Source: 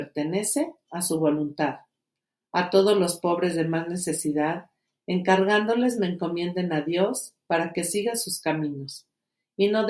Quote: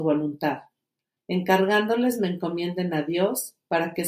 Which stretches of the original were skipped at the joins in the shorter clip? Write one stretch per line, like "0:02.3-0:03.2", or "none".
0:02.3-0:05.0